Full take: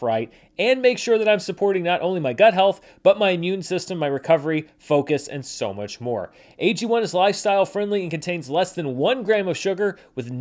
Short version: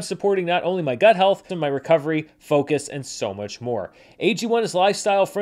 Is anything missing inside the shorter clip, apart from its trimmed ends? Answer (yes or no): yes